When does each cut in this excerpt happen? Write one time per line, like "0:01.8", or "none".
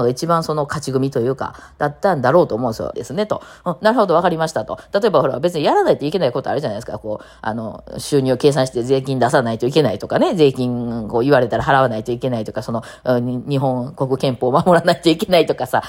0:02.9